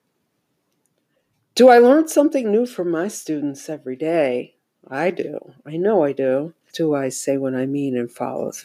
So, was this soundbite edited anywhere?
yes; 1 cut; at 6.7 s

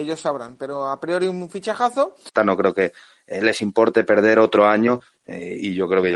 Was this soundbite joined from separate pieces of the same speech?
yes; 1 cut; at 2.4 s

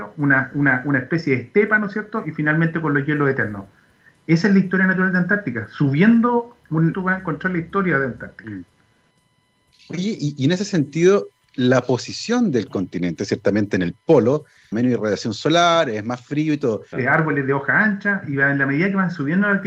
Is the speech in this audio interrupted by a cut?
yes; 3 cuts; at 6.9 s, 14.7 s, 16.9 s

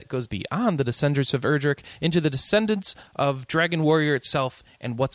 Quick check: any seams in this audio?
no; 0 cuts

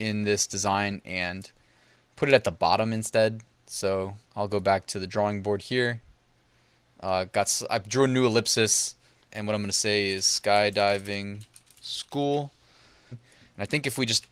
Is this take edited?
yes; 3 cuts; at 4.3 s, 9.3 s, 13.1 s

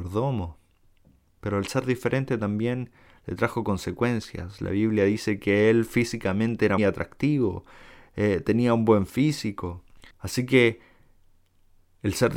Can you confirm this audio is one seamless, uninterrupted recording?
no; 2 cuts; at 6.8 s, 10.1 s

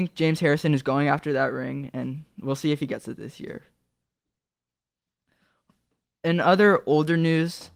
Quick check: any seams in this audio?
no; 0 cuts

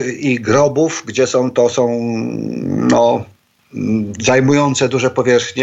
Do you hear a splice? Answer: no; 0 cuts

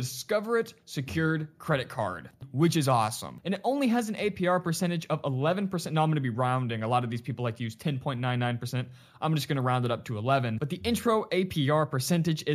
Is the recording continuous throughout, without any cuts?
no; 1 cut; at 2.4 s

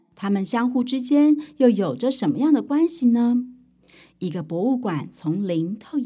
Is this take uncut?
yes; 0 cuts

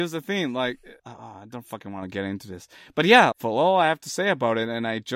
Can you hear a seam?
yes; 2 cuts; at 1.0 s, 3.3 s

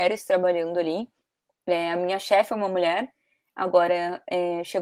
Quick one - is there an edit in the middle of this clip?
no; 0 cuts

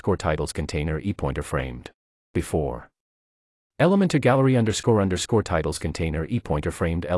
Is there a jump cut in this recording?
yes; 1 cut; at 2.1 s

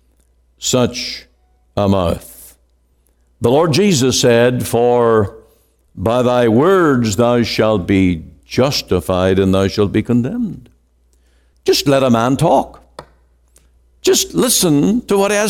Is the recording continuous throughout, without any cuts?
yes; 0 cuts

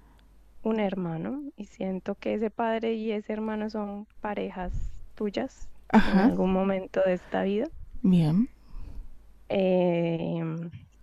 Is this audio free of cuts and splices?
yes; 0 cuts

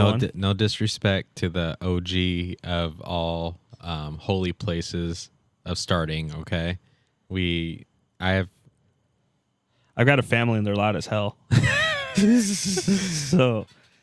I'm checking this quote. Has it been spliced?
no; 0 cuts

